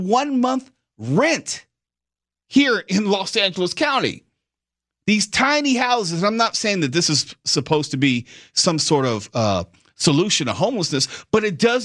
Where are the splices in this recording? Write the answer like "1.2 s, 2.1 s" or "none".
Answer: none